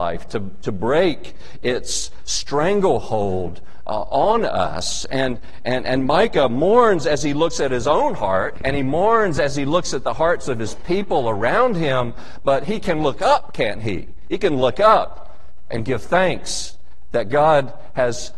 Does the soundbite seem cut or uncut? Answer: cut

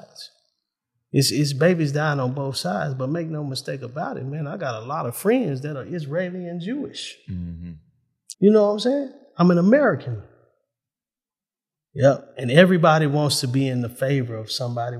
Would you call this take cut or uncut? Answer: cut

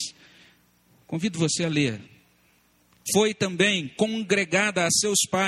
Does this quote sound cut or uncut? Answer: cut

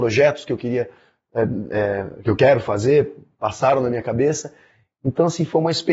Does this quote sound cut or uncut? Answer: uncut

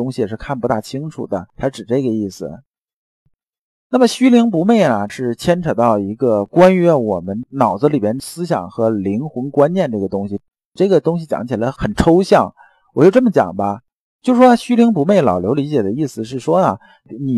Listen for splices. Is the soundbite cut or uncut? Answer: uncut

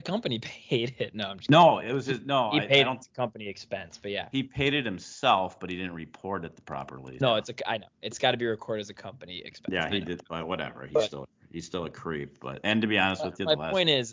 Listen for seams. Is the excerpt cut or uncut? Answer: cut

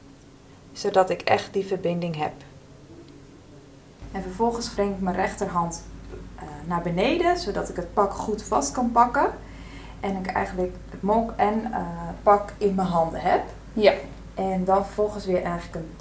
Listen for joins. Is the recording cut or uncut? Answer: cut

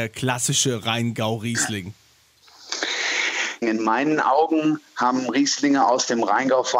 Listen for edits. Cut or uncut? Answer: cut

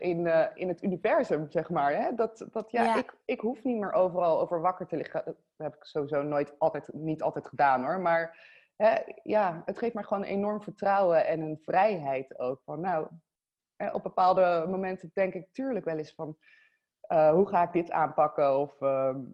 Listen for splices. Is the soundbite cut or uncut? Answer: uncut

